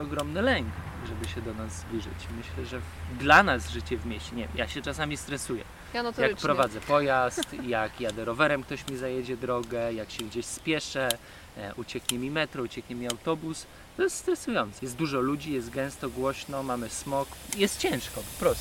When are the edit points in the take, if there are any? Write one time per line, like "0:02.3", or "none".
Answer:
0:14.8
0:17.5